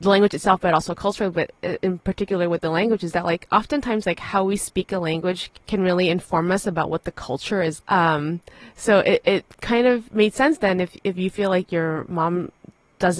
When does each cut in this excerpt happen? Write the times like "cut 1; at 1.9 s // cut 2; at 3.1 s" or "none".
cut 1; at 5.6 s // cut 2; at 7.8 s

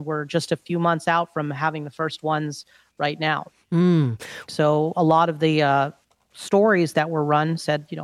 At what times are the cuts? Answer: cut 1; at 4.5 s

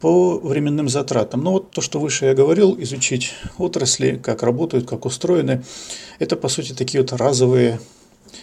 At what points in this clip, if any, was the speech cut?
none

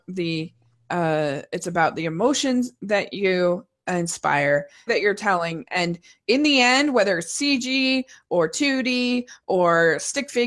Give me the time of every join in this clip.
cut 1; at 4.9 s

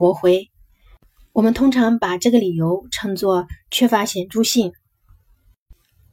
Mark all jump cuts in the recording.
none

